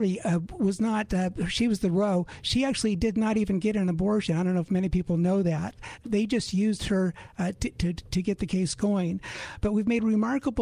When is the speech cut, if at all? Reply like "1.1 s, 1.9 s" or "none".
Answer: 6.0 s